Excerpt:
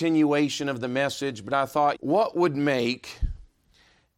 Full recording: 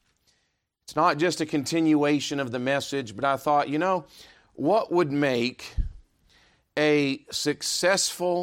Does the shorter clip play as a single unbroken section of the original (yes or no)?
no